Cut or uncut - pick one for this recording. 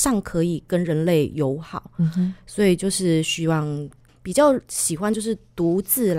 cut